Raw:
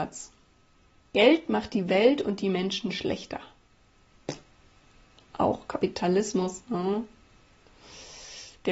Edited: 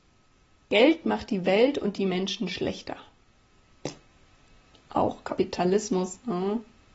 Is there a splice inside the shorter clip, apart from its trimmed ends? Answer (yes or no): no